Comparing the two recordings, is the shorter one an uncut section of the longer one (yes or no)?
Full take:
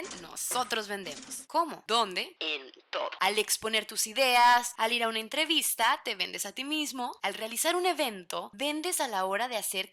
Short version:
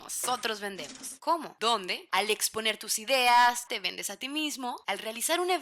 no